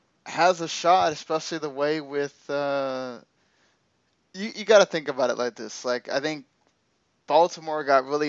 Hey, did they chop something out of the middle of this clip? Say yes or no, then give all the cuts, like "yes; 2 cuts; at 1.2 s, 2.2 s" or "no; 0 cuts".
no; 0 cuts